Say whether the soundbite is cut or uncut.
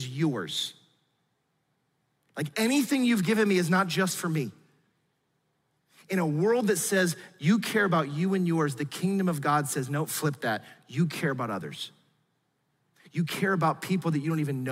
uncut